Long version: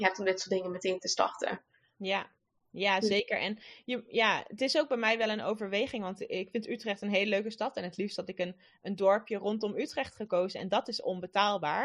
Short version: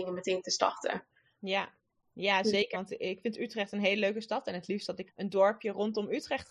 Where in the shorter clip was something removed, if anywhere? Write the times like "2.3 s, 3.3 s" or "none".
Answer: 2.7 s, 5.1 s

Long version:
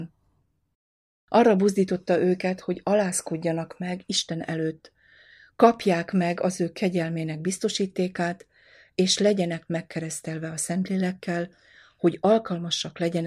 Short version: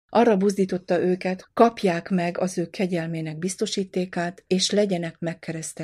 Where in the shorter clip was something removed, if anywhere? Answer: 1.4 s, 4.5 s

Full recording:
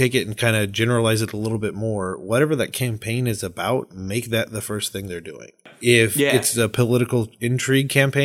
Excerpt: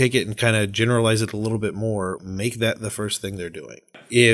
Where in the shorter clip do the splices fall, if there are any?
2.2 s

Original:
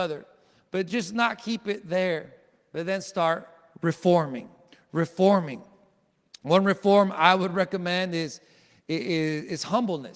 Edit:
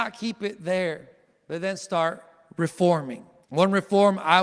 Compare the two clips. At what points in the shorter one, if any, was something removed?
3.5 s

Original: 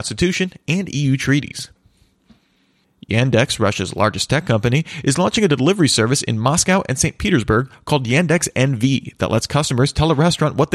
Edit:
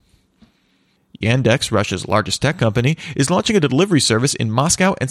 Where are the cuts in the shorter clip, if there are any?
none

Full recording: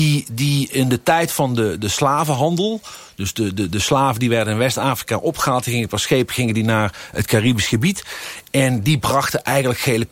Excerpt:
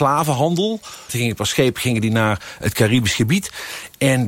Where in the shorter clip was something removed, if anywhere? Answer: 1.1 s

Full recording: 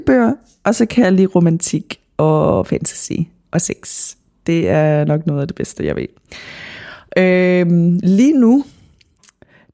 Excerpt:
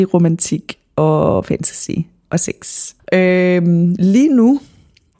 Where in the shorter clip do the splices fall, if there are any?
3.0 s

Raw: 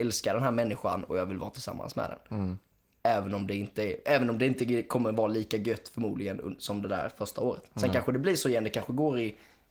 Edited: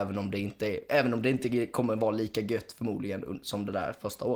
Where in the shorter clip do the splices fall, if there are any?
none

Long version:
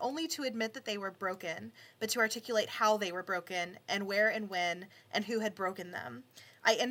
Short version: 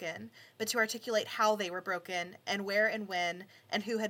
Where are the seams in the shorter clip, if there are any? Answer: none

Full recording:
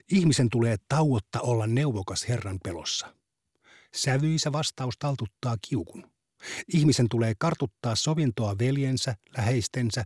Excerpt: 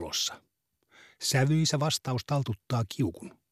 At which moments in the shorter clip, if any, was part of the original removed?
none

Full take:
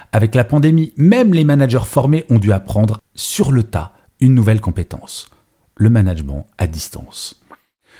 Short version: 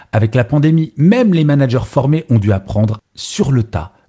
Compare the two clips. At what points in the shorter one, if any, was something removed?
none

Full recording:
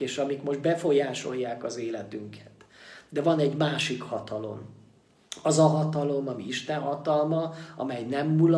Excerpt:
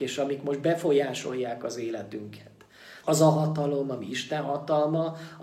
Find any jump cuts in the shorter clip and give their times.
3.0 s

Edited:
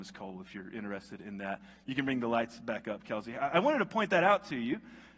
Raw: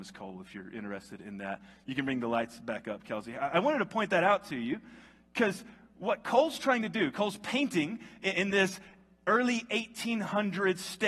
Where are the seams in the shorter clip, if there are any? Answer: none

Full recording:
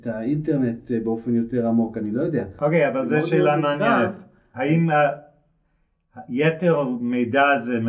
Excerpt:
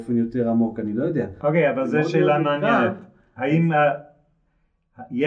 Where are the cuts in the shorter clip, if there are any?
none

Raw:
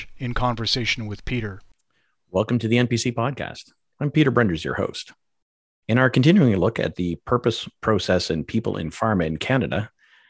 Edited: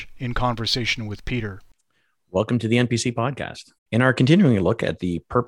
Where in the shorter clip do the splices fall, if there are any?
3.8 s

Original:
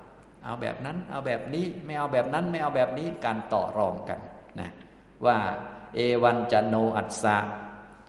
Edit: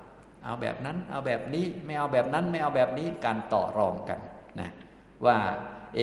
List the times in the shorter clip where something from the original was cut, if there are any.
none

